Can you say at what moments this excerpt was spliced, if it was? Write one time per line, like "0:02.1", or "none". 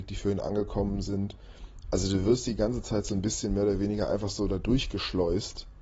none